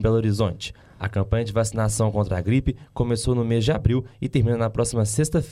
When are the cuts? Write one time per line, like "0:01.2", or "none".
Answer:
none